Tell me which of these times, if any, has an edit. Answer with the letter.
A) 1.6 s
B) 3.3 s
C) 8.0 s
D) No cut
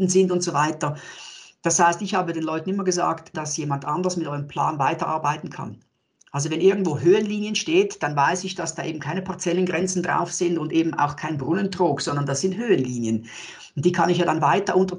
B